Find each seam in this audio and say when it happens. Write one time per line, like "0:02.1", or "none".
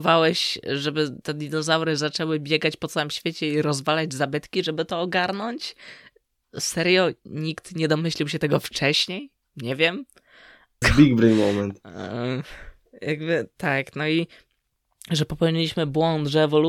0:10.8